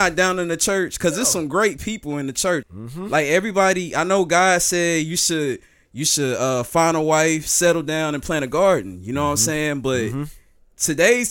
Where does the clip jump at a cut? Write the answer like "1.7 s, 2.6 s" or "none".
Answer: 2.6 s